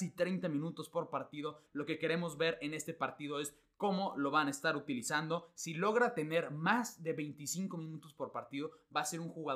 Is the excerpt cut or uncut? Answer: cut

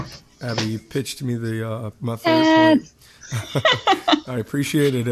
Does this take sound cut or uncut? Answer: cut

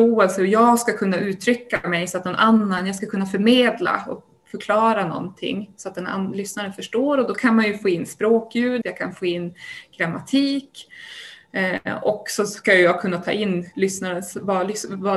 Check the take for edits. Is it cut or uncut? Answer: cut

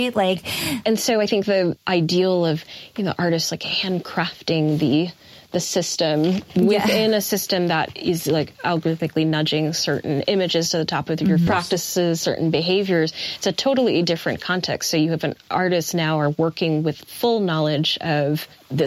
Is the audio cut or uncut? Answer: cut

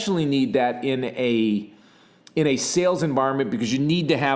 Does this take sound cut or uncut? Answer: uncut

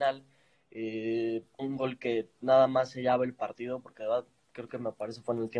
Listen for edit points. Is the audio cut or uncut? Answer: cut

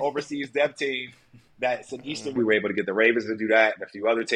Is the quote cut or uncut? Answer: cut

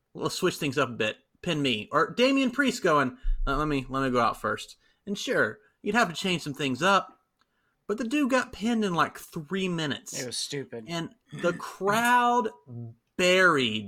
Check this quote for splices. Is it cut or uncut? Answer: uncut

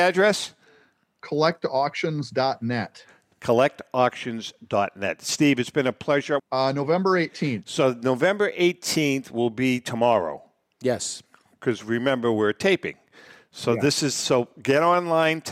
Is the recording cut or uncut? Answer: cut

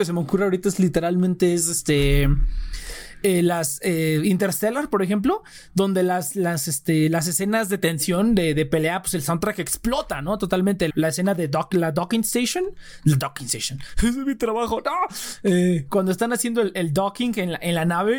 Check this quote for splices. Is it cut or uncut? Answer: cut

